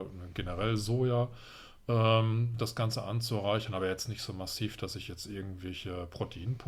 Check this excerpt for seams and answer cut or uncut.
uncut